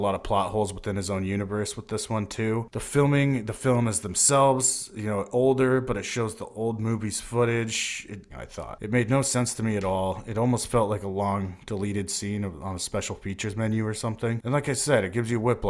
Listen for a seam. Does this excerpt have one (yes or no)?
yes